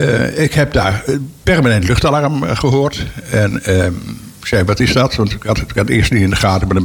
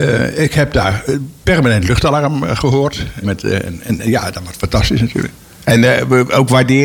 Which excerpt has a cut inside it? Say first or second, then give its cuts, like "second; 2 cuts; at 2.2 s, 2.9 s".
second; 1 cut; at 3.2 s